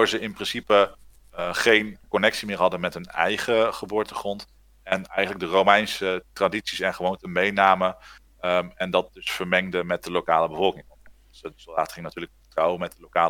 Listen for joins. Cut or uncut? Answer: uncut